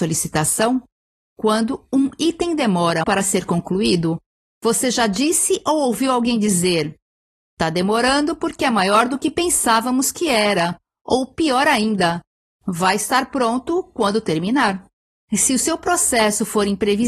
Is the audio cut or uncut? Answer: cut